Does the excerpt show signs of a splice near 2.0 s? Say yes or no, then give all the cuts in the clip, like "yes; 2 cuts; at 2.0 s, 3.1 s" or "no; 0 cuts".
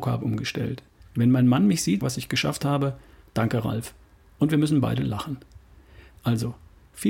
yes; 2 cuts; at 1.0 s, 2.0 s